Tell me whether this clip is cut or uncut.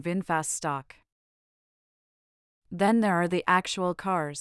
uncut